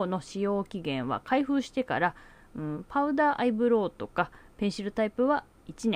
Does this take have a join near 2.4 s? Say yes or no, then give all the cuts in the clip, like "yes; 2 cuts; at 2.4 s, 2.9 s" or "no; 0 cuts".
no; 0 cuts